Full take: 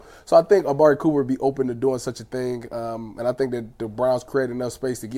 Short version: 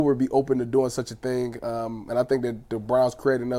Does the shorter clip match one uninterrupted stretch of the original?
yes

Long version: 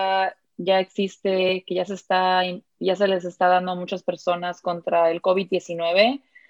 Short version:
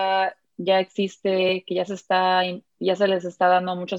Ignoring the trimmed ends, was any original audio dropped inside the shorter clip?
no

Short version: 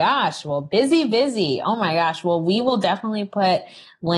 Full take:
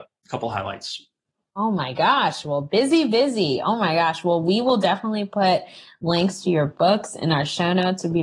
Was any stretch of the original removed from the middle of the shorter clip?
no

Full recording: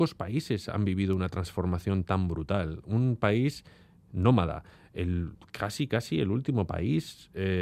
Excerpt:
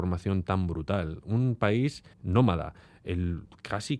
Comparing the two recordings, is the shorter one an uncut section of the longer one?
no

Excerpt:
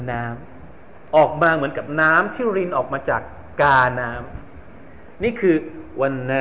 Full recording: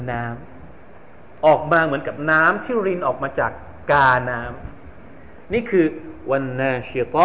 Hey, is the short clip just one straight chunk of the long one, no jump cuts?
no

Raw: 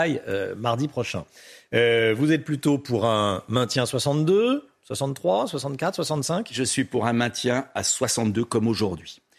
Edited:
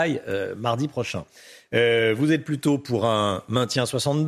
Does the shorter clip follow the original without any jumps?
yes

